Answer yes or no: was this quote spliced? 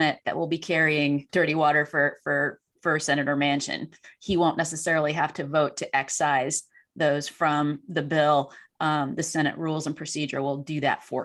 yes